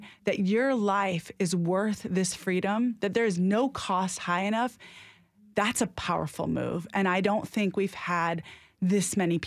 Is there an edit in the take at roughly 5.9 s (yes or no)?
yes